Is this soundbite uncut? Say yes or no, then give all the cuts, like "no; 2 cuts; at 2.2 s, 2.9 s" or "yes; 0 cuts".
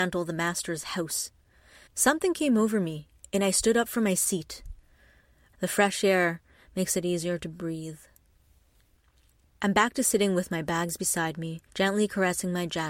no; 3 cuts; at 1.9 s, 5.5 s, 11.7 s